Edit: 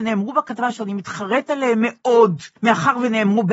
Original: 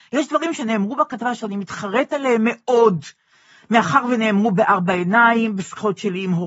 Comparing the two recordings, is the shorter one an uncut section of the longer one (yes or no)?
no